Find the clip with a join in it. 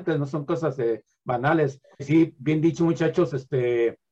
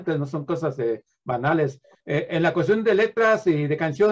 first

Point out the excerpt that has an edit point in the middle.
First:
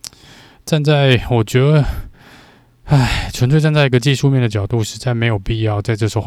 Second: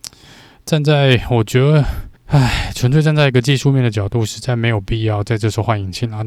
second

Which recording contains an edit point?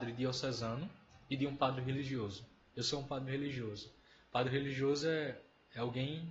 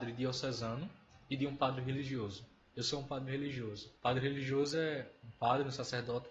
second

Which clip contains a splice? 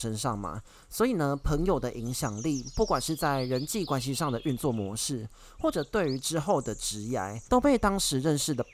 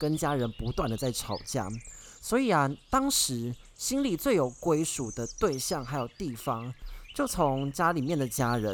first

